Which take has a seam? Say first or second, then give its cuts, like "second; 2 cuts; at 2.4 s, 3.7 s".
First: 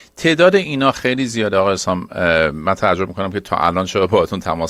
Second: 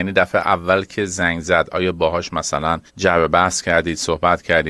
second; 1 cut; at 2.9 s